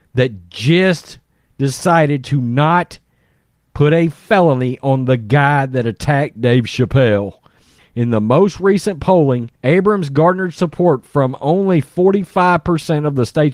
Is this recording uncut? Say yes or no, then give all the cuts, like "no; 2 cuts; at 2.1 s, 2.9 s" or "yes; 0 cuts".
no; 2 cuts; at 7.8 s, 9.6 s